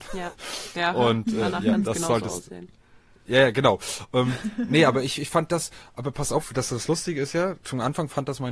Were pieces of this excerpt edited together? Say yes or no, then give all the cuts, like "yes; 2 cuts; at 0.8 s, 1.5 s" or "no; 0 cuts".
no; 0 cuts